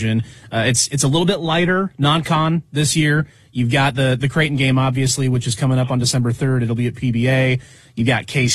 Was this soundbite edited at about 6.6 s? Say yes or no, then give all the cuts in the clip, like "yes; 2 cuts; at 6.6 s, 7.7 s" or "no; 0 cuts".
no; 1 cut; at 4.2 s